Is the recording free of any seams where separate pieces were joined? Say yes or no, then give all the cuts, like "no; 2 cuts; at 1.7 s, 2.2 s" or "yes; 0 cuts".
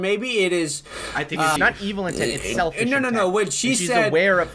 no; 1 cut; at 1.6 s